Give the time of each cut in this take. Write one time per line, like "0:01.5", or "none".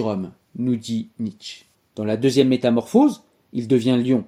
0:01.7